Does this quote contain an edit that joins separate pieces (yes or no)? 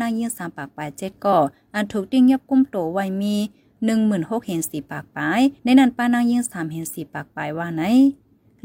no